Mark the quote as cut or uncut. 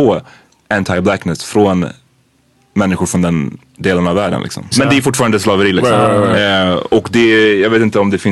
cut